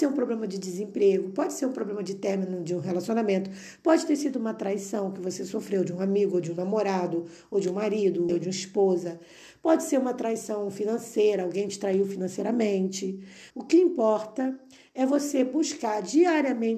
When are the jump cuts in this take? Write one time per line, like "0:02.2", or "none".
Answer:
0:08.3
0:13.5